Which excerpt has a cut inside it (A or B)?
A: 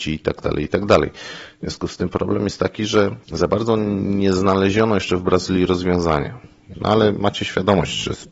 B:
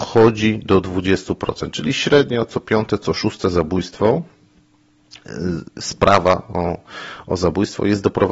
A